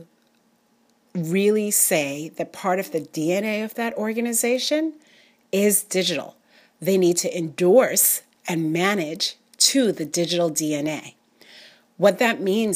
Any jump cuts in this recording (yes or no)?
no